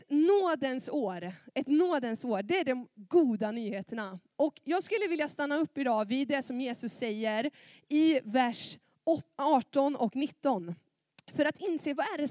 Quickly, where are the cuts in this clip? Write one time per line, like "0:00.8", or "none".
none